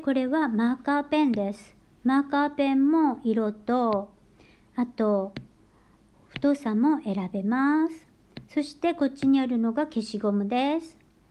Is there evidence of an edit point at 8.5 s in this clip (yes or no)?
no